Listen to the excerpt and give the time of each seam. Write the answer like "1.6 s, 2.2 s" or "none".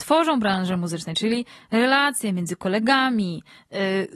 none